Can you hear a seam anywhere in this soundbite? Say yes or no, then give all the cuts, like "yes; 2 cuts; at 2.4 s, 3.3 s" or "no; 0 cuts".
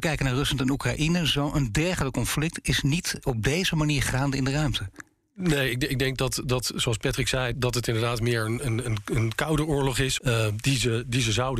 yes; 2 cuts; at 7.5 s, 10.2 s